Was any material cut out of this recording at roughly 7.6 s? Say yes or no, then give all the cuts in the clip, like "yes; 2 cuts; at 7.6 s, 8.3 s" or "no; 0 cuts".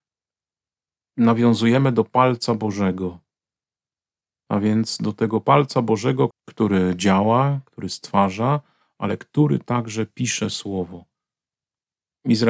no; 1 cut; at 6.3 s